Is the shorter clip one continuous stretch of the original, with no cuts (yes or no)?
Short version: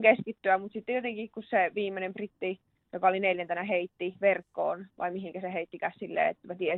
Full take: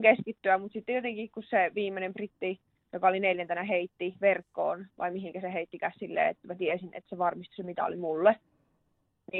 yes